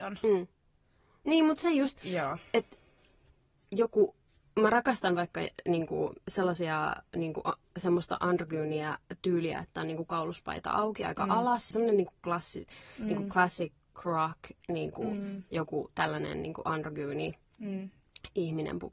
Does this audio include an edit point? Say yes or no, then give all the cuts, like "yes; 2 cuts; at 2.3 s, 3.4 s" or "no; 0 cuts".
yes; 1 cut; at 11.7 s